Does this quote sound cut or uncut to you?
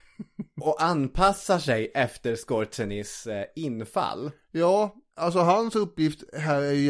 uncut